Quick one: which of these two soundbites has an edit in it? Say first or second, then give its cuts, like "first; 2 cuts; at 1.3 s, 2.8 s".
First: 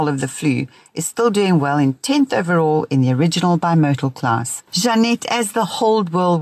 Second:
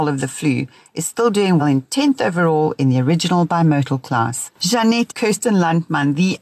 second; 2 cuts; at 1.6 s, 5.1 s